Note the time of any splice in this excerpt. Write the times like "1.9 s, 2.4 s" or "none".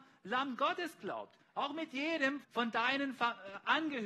2.4 s